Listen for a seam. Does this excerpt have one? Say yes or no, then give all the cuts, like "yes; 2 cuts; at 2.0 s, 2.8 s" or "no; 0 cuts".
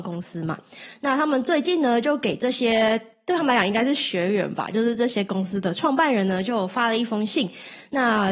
no; 0 cuts